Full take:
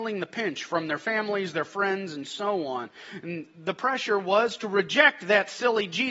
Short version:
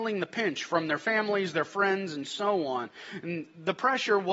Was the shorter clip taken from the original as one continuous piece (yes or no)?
yes